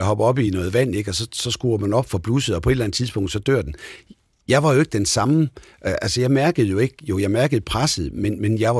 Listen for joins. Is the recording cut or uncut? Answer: uncut